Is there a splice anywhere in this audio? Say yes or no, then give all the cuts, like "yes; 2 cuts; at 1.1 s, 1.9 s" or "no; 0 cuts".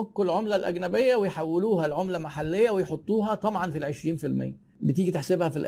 no; 0 cuts